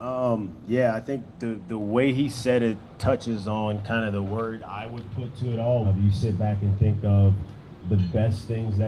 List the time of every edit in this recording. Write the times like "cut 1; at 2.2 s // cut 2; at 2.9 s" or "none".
cut 1; at 5.8 s